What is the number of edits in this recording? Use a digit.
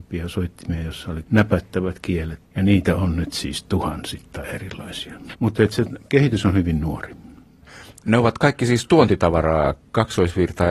1